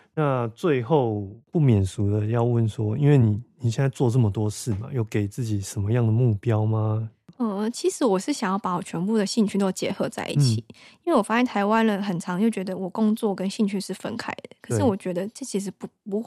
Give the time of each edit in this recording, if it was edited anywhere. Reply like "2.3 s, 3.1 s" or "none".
none